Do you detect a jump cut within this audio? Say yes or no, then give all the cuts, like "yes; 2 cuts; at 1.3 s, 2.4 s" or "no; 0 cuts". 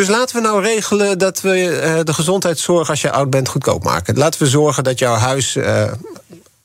no; 0 cuts